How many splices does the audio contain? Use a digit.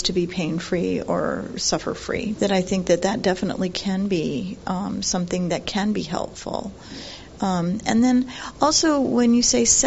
1